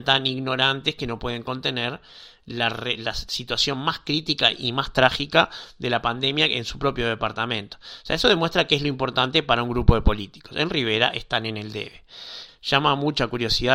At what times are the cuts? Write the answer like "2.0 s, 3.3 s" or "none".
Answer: 12.5 s